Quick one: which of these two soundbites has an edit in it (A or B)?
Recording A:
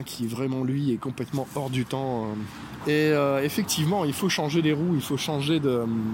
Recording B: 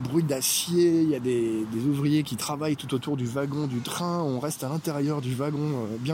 A